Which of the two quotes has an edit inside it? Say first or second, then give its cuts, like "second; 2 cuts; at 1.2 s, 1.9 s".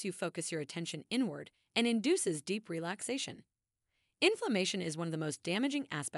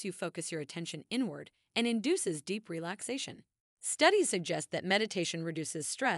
second; 1 cut; at 3.6 s